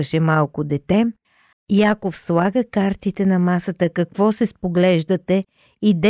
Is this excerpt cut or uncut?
cut